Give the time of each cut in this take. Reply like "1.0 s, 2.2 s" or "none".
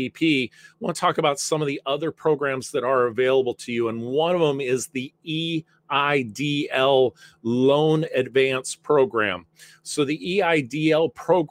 none